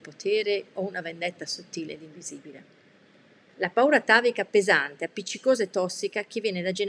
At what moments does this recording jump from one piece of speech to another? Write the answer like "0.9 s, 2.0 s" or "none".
3.5 s